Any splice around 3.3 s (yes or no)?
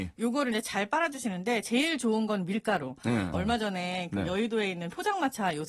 yes